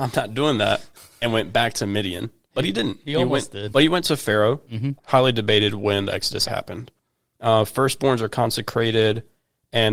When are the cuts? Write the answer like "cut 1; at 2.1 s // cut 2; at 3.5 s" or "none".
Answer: cut 1; at 3.7 s // cut 2; at 5.0 s // cut 3; at 6.5 s